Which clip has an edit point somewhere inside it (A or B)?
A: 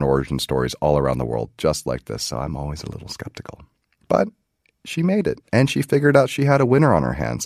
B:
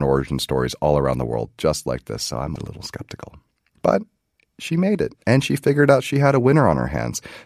B